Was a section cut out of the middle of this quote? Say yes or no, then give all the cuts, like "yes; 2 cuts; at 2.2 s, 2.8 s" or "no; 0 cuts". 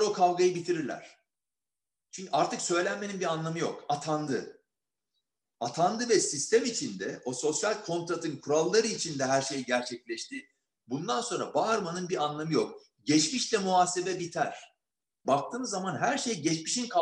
yes; 1 cut; at 15.2 s